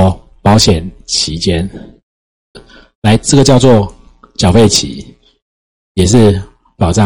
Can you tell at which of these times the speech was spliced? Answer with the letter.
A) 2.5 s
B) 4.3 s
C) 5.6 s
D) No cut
A